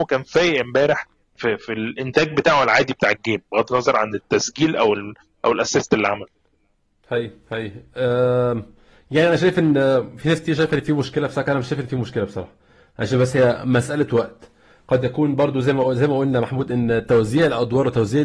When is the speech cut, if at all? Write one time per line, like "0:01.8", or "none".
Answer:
none